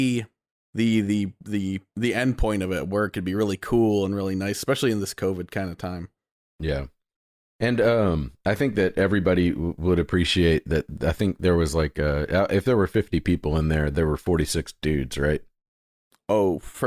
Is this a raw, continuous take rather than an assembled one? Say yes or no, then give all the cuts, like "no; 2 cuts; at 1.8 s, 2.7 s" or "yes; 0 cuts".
yes; 0 cuts